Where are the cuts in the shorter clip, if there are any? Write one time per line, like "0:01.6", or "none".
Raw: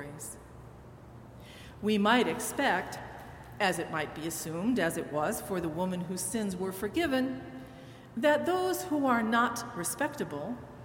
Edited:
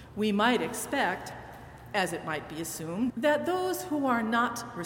0:03.1